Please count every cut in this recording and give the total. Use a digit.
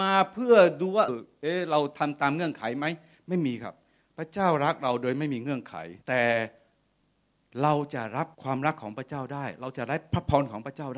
3